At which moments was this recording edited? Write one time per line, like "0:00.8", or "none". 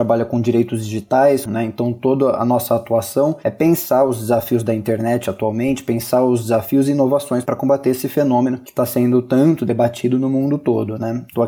0:01.5